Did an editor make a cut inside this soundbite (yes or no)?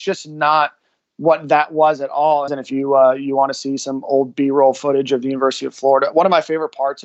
yes